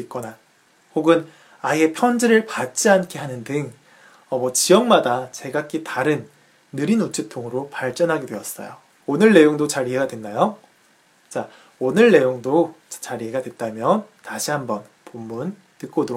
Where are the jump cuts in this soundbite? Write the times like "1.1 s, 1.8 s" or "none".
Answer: 9.0 s